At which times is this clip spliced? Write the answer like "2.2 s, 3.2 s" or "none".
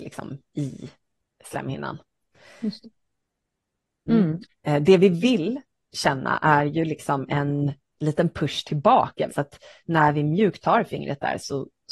4.5 s, 9.3 s